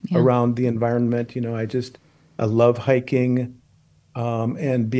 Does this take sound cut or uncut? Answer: uncut